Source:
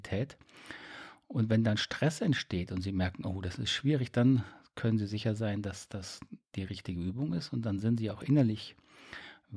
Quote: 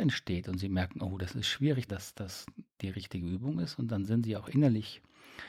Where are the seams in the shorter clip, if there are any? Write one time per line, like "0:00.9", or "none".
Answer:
0:01.9

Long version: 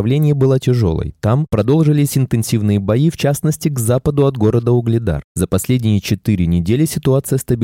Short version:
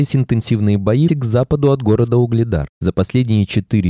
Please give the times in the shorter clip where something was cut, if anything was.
0:01.1

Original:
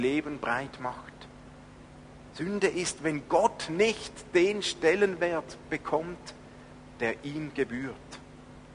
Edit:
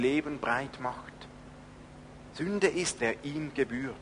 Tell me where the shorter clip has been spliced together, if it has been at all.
0:03.0

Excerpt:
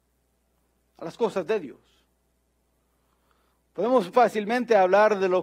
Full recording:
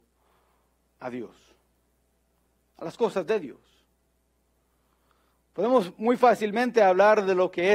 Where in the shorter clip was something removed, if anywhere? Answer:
0:04.1

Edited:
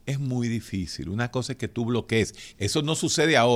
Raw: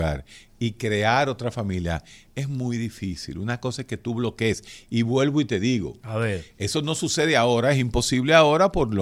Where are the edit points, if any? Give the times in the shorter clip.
0:02.5

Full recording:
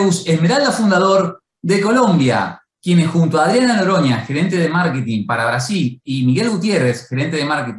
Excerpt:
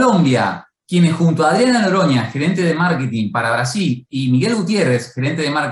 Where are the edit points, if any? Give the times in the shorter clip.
none

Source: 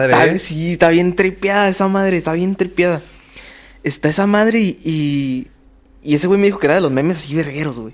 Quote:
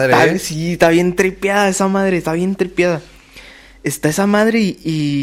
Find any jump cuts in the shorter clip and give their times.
none

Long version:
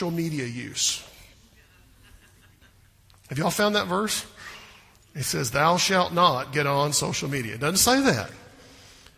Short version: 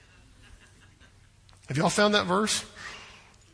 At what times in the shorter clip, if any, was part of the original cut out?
none

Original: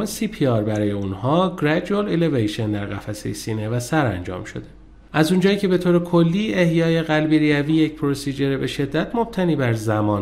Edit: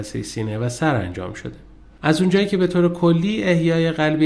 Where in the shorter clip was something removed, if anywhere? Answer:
none

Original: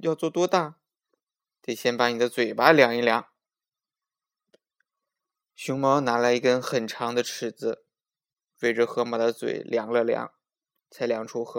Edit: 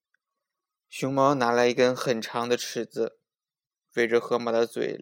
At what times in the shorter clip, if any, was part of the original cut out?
none

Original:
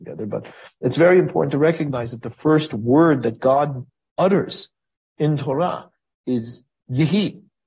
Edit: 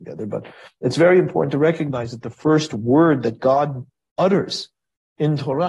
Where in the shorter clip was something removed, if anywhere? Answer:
none

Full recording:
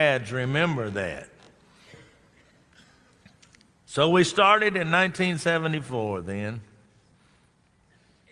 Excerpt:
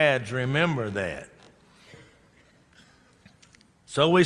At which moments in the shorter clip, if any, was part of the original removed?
none

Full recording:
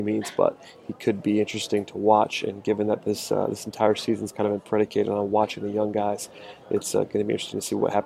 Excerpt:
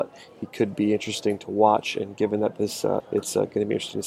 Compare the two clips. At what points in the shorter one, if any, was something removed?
0:03.0

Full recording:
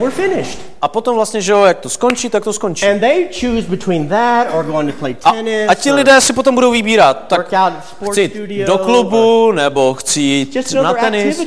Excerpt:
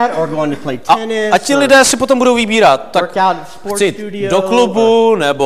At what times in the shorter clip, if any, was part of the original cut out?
none

